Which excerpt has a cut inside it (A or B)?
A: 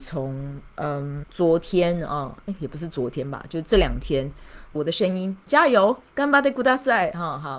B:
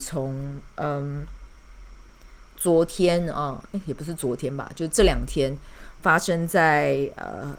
A